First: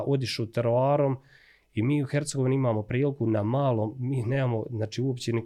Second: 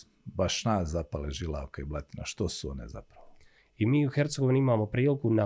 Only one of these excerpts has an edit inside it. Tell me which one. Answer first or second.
second